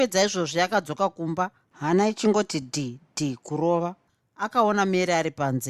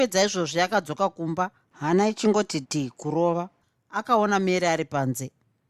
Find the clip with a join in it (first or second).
second